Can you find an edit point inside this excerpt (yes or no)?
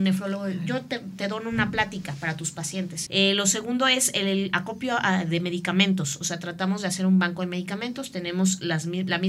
yes